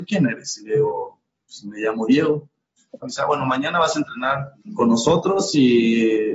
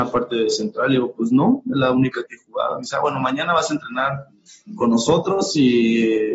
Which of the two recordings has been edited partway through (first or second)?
first